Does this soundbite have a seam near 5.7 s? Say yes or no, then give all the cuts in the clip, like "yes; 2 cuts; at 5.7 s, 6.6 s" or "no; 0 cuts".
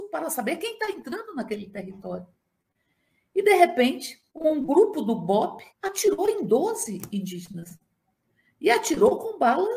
yes; 2 cuts; at 4.3 s, 5.7 s